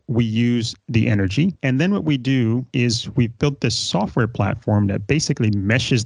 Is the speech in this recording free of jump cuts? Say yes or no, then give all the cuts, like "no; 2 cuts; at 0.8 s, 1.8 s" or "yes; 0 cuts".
no; 1 cut; at 1.6 s